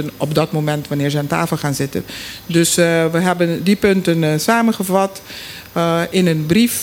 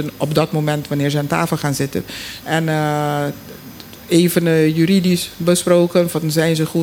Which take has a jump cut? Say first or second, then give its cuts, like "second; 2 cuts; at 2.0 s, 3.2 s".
second; 1 cut; at 2.4 s